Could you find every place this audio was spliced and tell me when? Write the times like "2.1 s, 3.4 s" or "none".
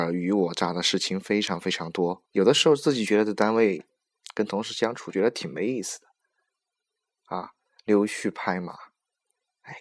2.3 s